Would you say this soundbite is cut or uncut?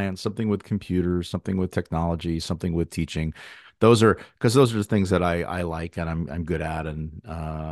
uncut